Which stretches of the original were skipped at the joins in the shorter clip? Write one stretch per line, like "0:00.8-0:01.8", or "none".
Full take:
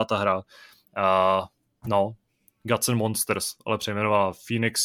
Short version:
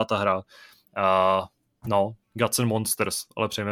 0:02.2-0:02.5